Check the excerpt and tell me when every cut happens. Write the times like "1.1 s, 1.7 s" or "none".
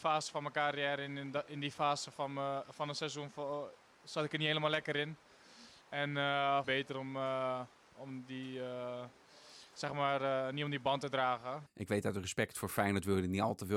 6.6 s, 11.7 s